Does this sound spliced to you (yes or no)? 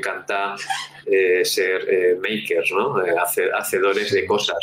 no